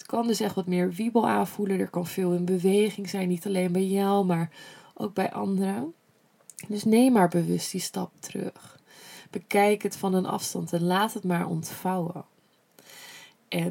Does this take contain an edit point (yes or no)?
no